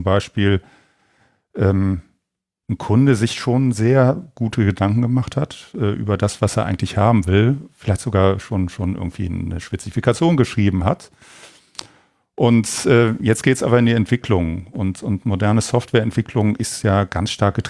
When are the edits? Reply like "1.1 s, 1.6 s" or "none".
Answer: none